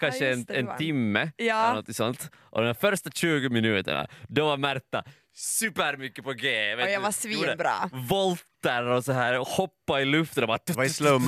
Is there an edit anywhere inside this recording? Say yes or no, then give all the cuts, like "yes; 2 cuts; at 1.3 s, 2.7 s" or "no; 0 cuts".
no; 0 cuts